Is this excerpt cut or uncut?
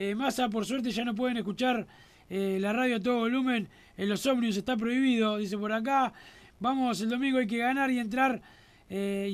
uncut